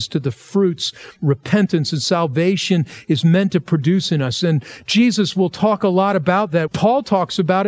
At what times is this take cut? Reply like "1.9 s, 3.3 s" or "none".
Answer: 4.4 s, 6.7 s